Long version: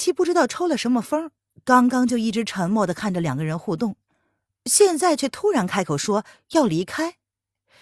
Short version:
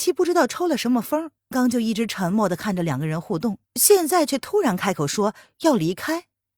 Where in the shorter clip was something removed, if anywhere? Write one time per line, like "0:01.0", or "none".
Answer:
0:01.5
0:03.6